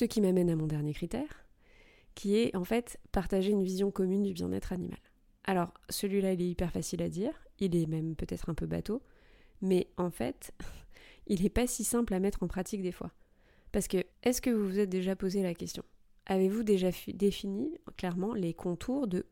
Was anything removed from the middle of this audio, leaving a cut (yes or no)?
yes